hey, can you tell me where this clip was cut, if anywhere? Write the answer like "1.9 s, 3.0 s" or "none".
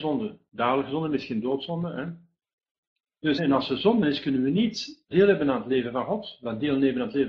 3.4 s, 5.1 s